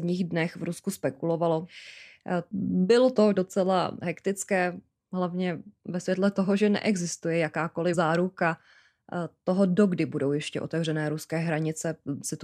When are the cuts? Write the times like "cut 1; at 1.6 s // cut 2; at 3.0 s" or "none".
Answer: cut 1; at 2.5 s